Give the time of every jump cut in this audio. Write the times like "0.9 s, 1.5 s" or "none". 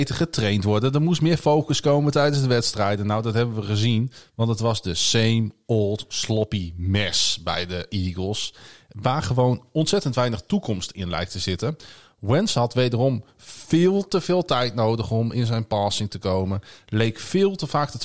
none